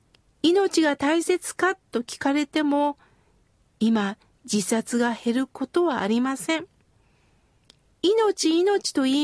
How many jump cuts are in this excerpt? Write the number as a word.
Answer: zero